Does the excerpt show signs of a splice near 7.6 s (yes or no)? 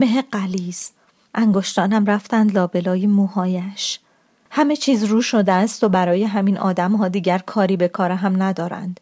no